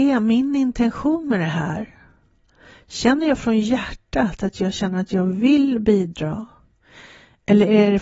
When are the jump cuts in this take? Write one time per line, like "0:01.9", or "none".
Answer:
none